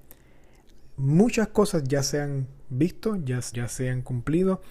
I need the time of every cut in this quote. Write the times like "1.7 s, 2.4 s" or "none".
3.5 s